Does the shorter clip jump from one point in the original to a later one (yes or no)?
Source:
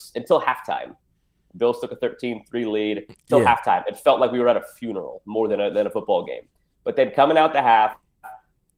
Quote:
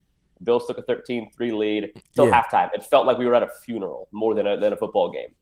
no